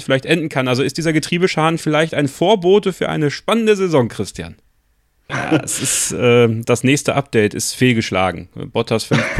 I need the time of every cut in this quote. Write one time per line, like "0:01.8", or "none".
0:05.3
0:06.6